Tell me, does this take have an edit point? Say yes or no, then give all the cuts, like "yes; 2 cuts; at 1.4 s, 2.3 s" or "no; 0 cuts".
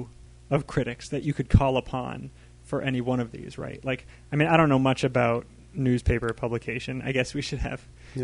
no; 0 cuts